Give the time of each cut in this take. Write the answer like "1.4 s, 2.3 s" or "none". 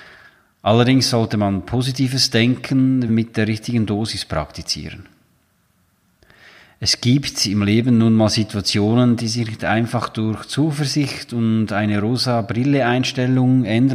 3.1 s